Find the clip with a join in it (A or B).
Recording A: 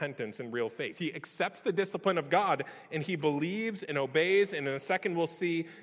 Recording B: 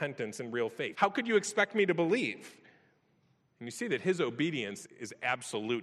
B